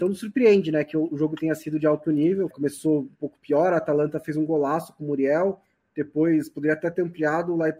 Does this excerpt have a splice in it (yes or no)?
yes